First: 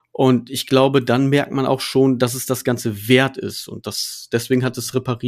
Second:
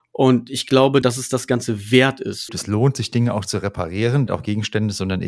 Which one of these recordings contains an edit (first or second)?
second